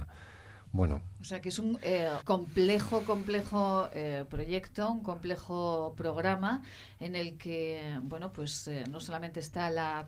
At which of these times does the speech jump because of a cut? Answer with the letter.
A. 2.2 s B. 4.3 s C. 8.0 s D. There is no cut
A